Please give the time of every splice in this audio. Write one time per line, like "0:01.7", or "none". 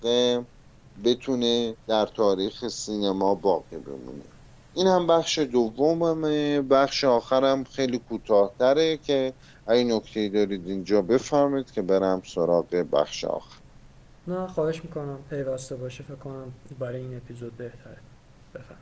0:01.8